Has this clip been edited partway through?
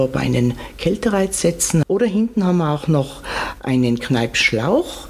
yes; 1 cut; at 1.8 s

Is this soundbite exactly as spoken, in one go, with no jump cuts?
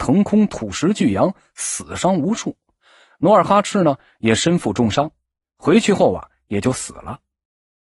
yes; 0 cuts

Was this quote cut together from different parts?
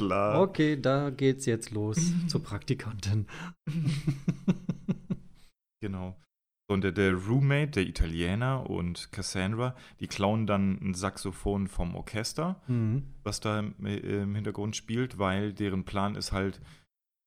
no; 0 cuts

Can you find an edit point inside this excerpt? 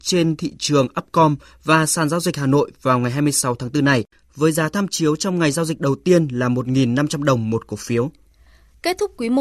no; 0 cuts

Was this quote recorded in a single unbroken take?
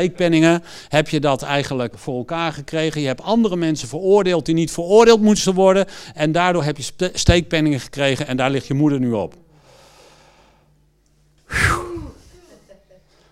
no; 1 cut; at 1.9 s

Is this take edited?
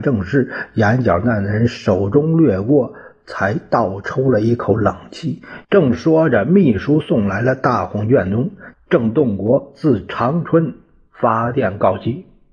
yes; 2 cuts; at 5.6 s, 8.7 s

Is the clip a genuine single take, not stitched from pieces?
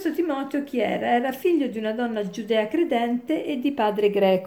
yes; 0 cuts

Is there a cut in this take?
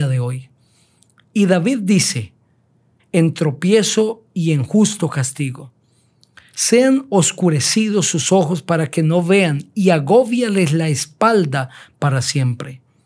yes; 1 cut; at 3.0 s

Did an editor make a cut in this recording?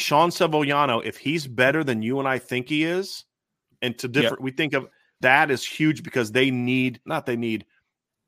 yes; 2 cuts; at 5.2 s, 7.1 s

